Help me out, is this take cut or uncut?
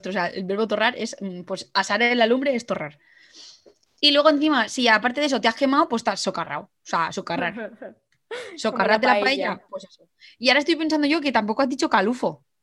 uncut